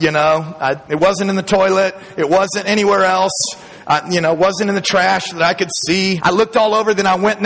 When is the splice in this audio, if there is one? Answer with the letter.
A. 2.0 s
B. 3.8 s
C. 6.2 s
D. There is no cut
C